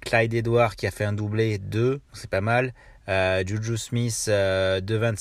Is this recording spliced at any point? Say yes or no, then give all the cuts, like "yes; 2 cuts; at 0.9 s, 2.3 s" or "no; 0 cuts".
yes; 1 cut; at 2.1 s